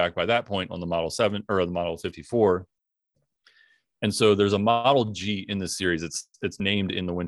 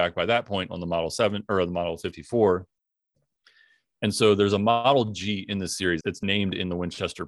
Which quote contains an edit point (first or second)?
second